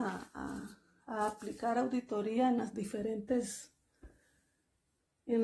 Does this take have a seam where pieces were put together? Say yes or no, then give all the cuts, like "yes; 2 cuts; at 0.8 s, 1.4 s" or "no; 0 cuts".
no; 0 cuts